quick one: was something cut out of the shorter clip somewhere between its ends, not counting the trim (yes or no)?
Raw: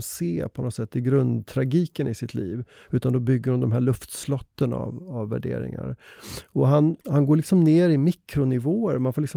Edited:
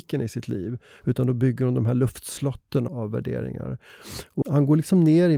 yes